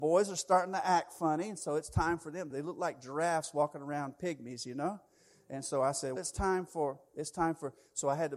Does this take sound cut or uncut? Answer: cut